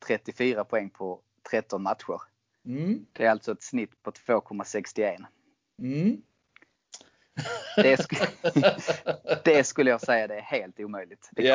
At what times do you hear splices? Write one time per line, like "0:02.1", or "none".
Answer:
none

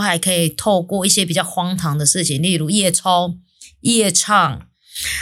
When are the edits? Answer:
none

